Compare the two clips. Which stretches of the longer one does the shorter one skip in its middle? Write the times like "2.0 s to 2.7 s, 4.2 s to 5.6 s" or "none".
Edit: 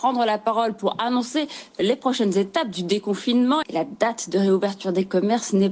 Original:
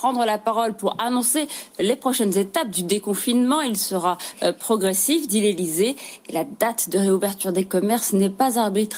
3.6 s to 6.2 s